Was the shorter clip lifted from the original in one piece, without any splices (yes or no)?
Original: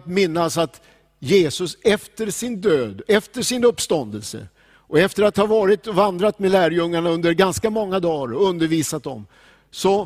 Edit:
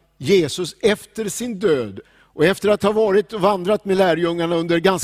no